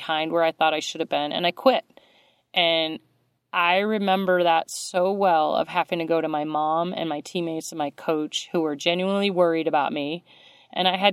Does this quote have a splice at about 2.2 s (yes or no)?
no